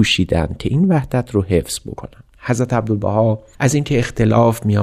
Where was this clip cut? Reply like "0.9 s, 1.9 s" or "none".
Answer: none

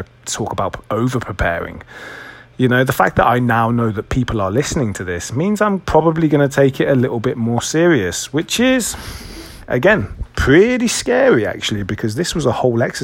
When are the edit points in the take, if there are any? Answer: 2.4 s

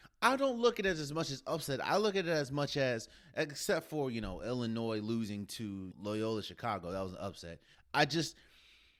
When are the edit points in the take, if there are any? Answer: 5.9 s, 7.7 s

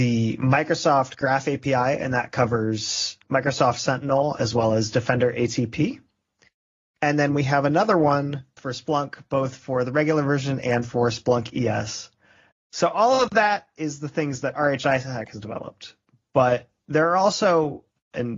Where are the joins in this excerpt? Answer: 12.5 s

